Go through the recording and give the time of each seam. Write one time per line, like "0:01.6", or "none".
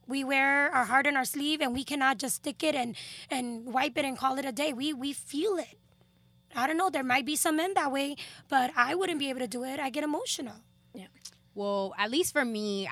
none